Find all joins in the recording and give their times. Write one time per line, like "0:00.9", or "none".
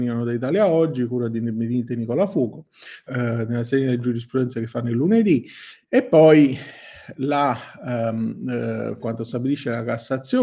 0:03.1
0:05.8
0:09.0